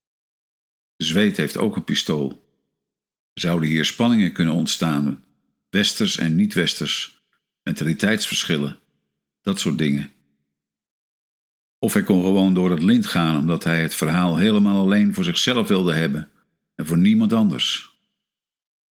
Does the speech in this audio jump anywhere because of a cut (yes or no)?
no